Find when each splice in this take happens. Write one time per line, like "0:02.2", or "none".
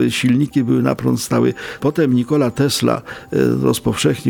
0:01.8